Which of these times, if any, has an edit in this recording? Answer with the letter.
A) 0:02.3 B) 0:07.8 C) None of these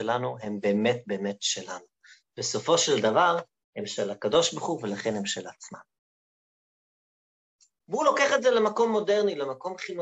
B